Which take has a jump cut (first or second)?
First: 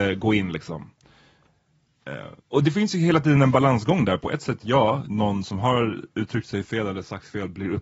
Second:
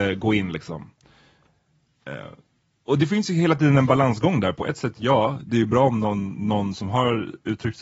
first